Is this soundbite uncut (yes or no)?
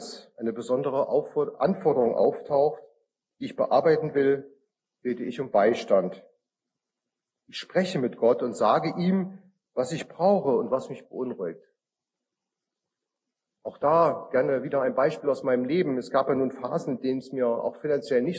yes